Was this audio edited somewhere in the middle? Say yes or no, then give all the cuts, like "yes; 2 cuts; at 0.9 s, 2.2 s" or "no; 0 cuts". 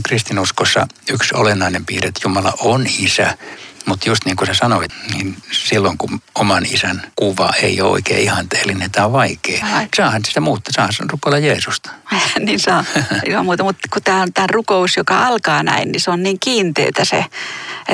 yes; 1 cut; at 9.6 s